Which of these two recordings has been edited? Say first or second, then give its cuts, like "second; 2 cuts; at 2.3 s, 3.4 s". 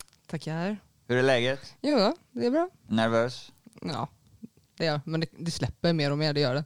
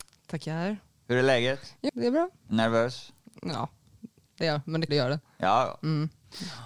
second; 2 cuts; at 1.9 s, 4.9 s